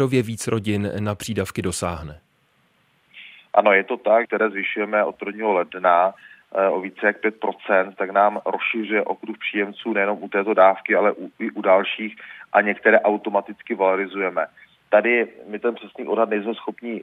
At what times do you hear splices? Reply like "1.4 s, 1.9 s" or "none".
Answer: 4.2 s